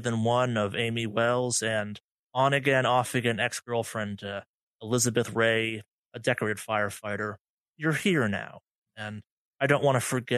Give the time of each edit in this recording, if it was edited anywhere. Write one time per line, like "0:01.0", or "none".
0:08.9